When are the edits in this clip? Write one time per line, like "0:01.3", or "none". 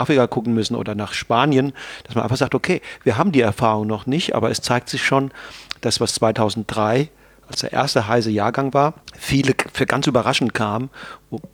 0:09.0